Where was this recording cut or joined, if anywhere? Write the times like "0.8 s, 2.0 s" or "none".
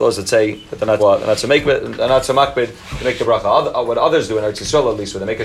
1.0 s